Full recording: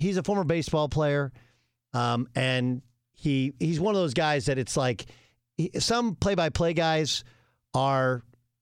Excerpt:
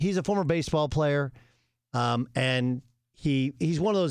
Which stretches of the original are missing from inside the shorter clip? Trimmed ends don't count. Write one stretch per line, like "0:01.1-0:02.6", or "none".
none